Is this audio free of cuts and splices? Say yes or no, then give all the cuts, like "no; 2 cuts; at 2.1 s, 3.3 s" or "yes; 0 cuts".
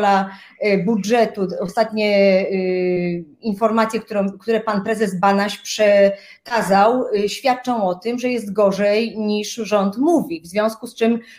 yes; 0 cuts